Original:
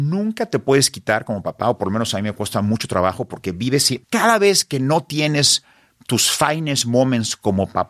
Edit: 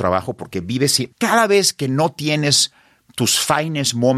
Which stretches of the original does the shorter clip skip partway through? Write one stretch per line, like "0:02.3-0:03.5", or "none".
none